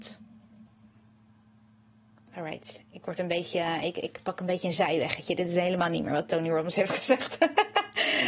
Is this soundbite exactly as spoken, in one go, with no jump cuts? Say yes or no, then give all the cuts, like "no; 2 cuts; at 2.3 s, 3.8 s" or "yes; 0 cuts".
yes; 0 cuts